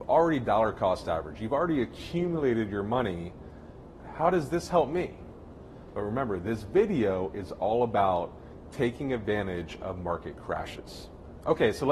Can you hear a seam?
yes; 2 cuts; at 4.0 s, 5.9 s

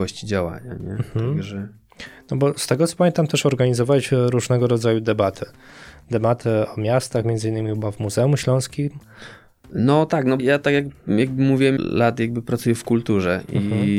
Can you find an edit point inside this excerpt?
yes; 2 cuts; at 10.4 s, 11.8 s

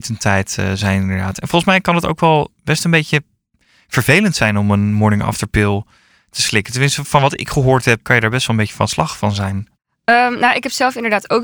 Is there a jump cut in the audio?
yes; 1 cut; at 8.0 s

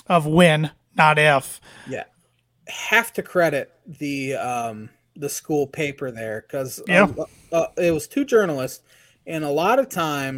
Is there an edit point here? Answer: no; 0 cuts

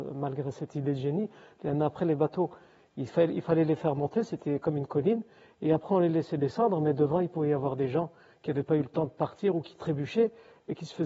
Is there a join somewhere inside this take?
no; 0 cuts

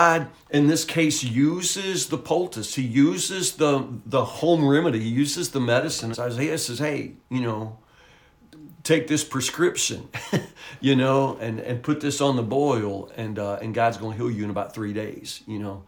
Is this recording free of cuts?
no; 1 cut; at 6.1 s

